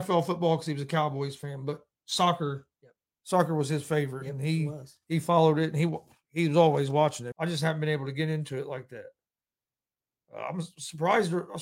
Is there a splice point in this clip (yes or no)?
yes